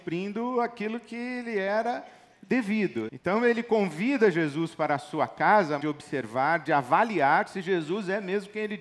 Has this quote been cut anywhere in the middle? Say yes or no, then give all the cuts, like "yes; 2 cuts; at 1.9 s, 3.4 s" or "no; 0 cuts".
yes; 2 cuts; at 3.1 s, 5.8 s